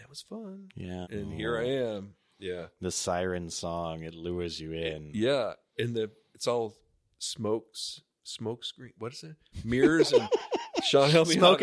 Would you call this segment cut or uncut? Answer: cut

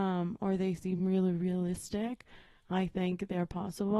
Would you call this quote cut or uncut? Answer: uncut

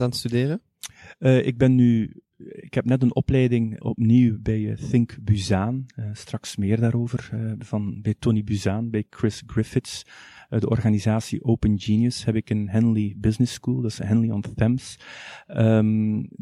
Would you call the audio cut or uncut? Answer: cut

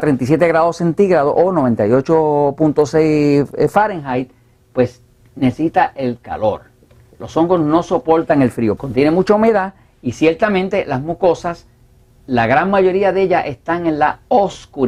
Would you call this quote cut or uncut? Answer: cut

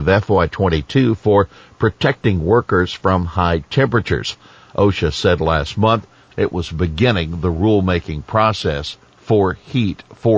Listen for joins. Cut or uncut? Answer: uncut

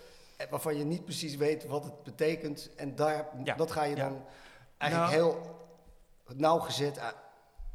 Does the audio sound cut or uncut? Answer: uncut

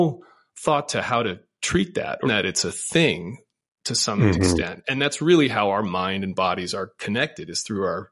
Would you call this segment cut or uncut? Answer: cut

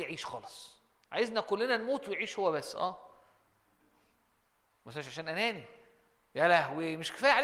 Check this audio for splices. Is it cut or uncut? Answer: uncut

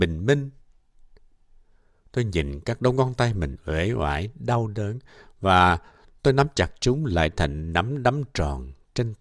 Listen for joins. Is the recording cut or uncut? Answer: uncut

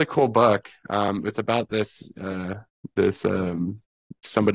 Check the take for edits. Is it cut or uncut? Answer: uncut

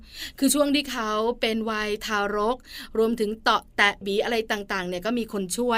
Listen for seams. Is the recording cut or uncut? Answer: cut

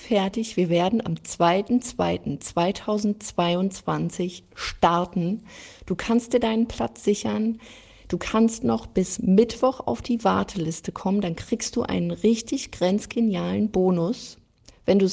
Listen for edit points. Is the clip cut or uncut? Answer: uncut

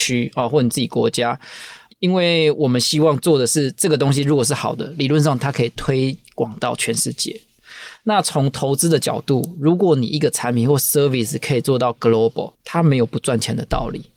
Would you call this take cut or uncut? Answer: cut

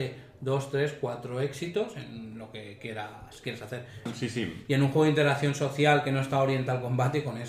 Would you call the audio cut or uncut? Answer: cut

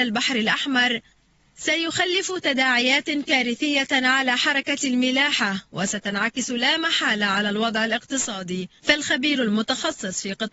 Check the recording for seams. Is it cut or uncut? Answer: cut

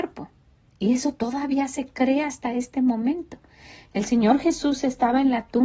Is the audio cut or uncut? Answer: cut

